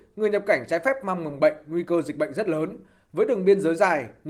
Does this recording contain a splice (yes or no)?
no